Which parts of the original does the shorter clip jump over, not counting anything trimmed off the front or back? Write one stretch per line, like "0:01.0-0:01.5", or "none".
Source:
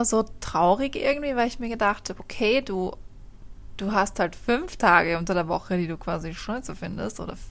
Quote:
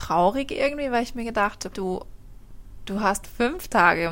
0:02.2-0:02.6
0:04.1-0:04.3